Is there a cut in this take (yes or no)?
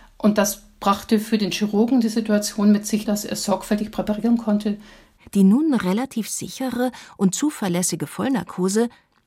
yes